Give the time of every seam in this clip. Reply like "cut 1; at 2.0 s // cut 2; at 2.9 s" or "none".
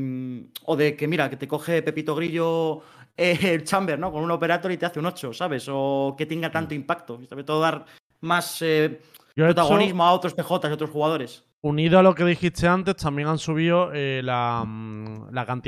none